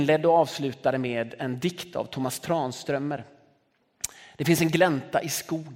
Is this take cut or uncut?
uncut